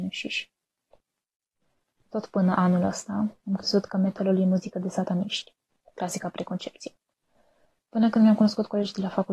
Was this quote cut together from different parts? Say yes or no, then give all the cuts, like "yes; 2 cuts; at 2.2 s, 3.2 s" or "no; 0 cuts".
no; 0 cuts